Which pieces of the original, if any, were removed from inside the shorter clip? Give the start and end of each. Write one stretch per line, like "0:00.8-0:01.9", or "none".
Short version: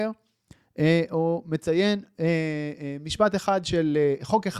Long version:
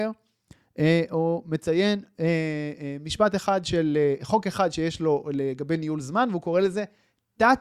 none